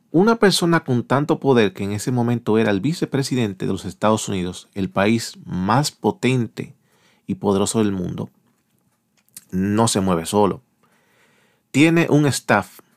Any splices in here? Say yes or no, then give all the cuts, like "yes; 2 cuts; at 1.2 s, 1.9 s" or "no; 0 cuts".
no; 0 cuts